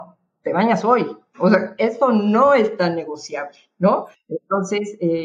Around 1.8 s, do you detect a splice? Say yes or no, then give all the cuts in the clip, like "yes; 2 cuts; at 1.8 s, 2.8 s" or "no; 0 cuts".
no; 1 cut; at 4.1 s